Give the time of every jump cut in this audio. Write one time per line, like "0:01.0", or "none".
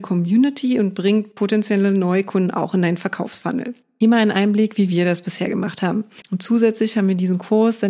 0:06.2

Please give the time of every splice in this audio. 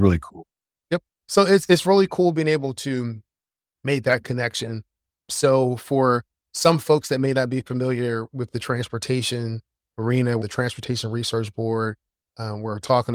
0:10.4

